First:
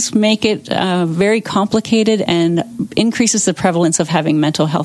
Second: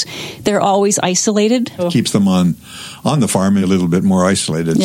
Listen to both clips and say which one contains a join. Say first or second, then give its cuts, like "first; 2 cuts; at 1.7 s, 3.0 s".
second; 2 cuts; at 1.8 s, 3.6 s